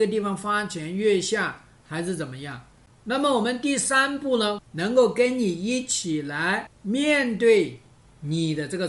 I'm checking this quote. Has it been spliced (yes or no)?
yes